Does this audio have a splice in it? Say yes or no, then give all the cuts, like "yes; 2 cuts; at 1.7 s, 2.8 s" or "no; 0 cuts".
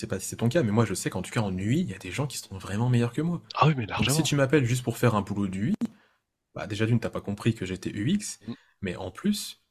no; 0 cuts